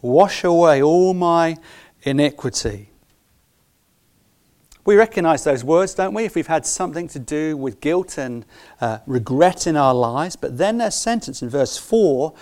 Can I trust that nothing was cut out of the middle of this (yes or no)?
yes